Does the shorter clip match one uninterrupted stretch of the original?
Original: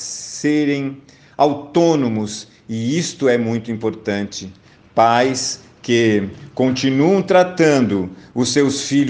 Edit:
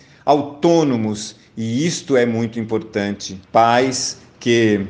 no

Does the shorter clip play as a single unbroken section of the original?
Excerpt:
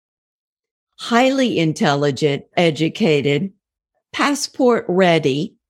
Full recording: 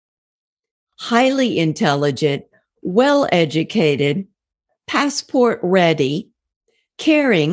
no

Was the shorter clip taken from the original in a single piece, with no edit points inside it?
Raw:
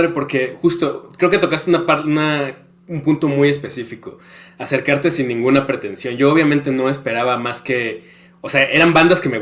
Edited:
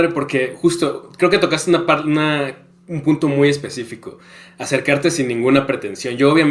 yes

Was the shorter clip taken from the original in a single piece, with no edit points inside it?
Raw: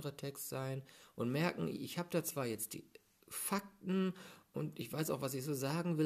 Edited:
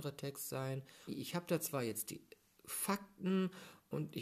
no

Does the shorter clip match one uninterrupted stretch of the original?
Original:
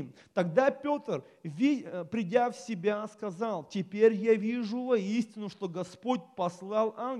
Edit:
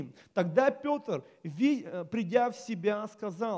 yes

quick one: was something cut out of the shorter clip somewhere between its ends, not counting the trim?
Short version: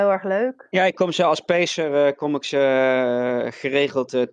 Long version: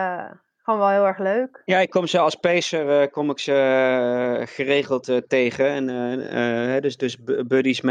no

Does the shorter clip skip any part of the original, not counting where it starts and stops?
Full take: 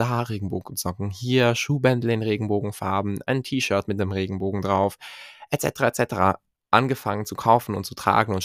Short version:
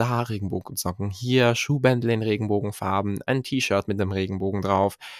no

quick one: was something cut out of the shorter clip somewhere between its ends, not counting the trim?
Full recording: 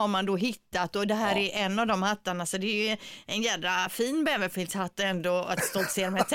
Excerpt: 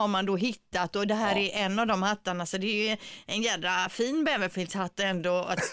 no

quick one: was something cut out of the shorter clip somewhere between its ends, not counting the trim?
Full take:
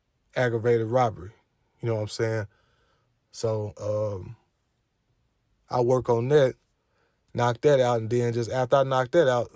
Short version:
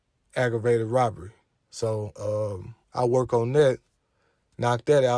yes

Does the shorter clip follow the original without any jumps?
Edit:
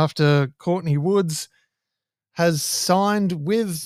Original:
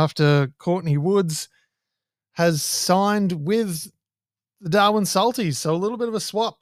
yes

